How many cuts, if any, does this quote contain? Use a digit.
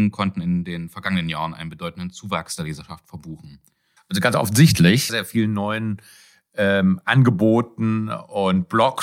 2